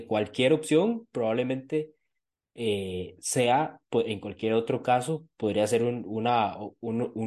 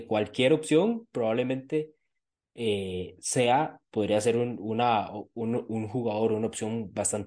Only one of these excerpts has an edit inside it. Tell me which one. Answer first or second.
second